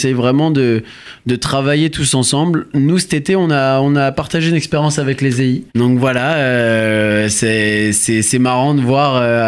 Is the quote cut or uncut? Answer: cut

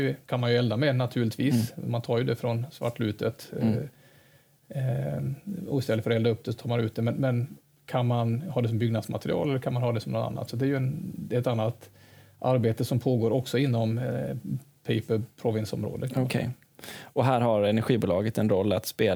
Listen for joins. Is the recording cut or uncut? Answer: uncut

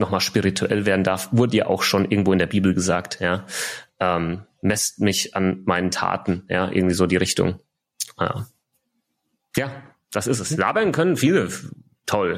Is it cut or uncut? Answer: uncut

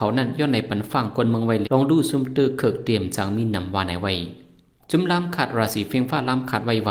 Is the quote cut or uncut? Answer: cut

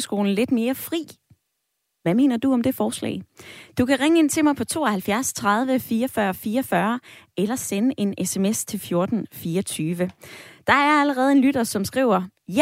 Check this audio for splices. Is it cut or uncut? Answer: uncut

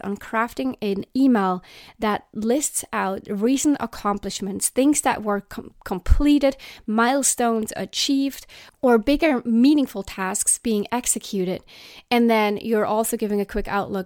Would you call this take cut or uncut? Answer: uncut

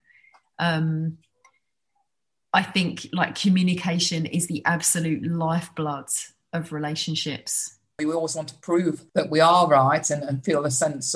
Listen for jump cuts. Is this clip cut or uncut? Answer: cut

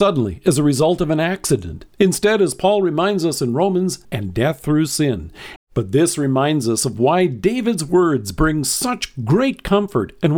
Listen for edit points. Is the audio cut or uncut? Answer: cut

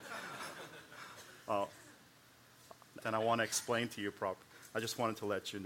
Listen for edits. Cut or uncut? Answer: cut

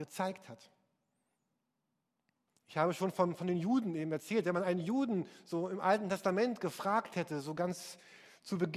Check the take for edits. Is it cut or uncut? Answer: cut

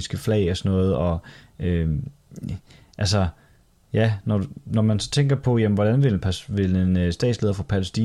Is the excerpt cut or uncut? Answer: uncut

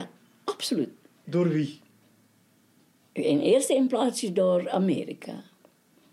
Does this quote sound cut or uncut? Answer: cut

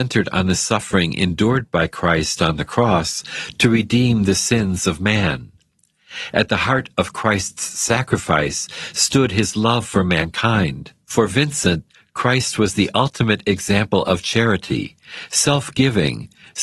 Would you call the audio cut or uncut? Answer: cut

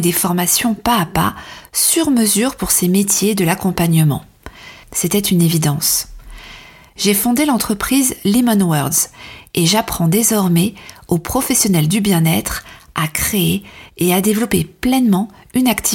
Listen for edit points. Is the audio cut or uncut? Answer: cut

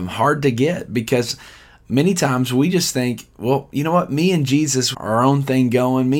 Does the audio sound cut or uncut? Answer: cut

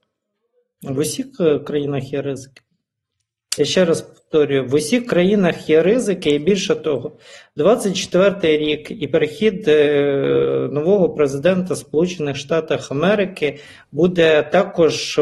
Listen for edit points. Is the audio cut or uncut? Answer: uncut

